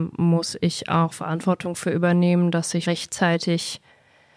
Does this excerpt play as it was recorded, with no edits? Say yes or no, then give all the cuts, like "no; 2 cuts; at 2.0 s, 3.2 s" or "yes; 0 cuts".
no; 1 cut; at 2.8 s